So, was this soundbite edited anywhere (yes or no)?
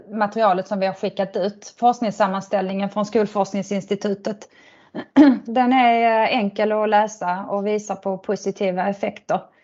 no